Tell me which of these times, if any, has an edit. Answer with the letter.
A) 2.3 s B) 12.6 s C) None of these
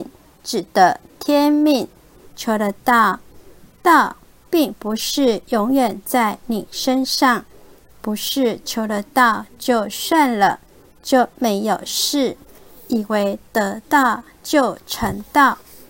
A